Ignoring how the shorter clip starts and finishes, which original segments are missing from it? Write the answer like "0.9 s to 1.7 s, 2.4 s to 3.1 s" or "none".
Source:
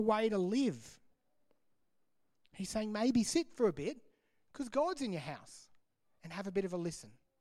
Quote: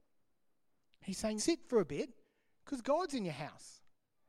2.9 s to 3.2 s